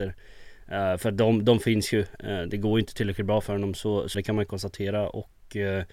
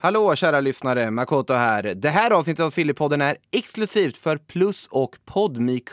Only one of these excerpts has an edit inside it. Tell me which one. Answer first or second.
first